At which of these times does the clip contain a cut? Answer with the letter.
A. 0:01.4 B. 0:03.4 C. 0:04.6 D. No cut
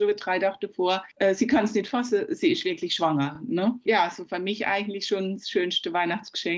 D